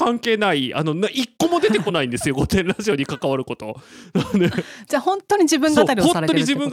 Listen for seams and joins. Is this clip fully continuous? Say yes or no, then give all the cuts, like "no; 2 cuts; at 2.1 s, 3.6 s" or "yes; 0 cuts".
yes; 0 cuts